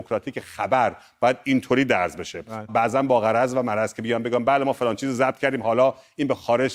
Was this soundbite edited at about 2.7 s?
yes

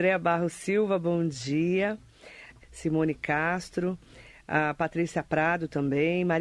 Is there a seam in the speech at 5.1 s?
no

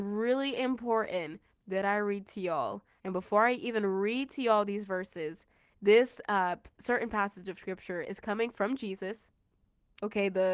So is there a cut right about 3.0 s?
yes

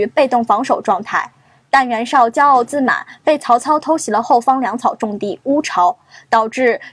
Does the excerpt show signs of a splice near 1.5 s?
no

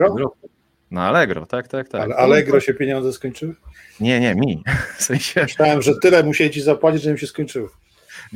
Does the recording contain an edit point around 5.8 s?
no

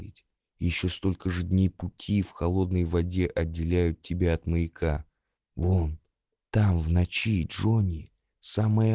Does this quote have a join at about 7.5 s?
no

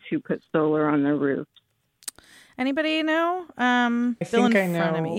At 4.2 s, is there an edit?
yes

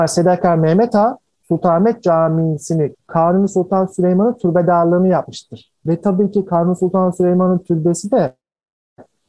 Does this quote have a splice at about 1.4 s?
no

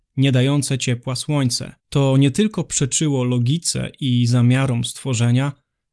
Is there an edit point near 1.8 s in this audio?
yes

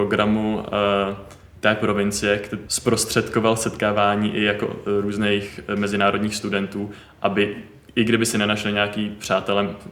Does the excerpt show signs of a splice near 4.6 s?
no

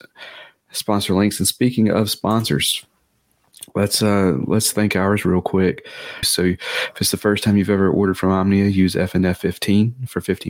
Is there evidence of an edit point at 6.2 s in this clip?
yes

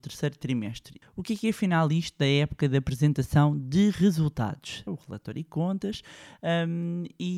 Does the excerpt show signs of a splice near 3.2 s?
no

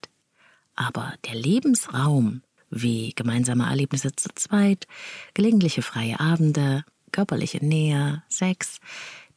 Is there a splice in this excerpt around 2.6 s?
yes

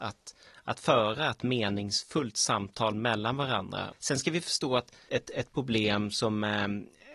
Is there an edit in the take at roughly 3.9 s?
yes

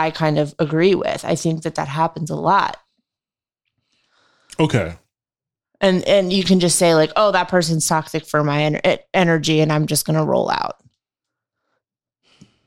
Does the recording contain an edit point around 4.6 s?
no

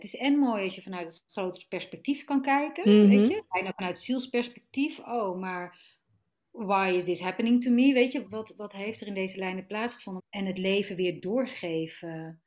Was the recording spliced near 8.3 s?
yes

